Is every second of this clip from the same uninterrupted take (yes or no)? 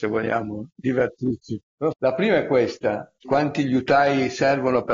no